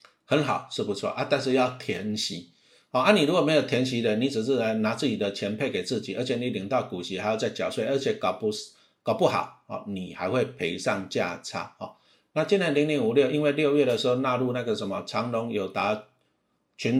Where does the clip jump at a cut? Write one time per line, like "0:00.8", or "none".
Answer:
none